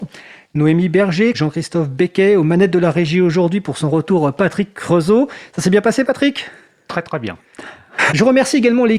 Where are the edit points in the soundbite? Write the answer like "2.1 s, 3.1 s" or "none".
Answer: 1.3 s, 8.1 s